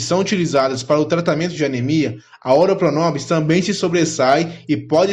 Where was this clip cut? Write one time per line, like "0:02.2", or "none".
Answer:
none